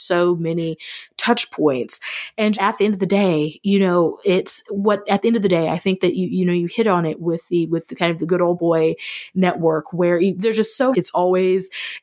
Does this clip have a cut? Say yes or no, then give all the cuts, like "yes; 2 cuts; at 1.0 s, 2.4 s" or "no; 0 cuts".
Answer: yes; 2 cuts; at 2.5 s, 10.9 s